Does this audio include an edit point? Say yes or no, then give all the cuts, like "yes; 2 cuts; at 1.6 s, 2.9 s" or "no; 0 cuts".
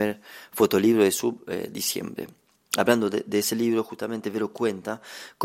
no; 0 cuts